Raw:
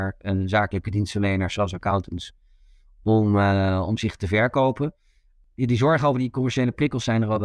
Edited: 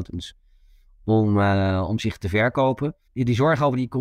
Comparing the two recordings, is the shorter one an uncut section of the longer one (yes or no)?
no